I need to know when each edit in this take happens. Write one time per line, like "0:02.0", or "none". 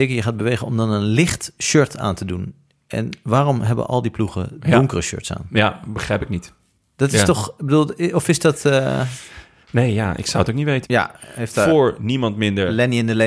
0:10.8